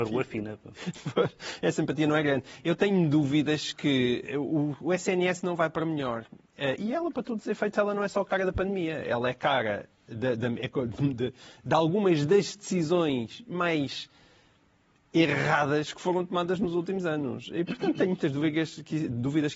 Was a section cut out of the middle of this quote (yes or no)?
no